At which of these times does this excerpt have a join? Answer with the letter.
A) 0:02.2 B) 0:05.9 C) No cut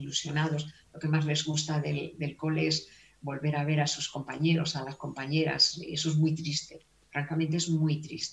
C